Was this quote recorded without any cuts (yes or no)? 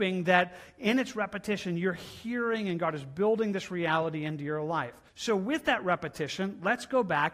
no